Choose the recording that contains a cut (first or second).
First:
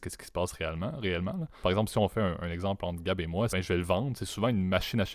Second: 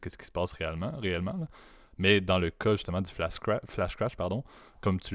first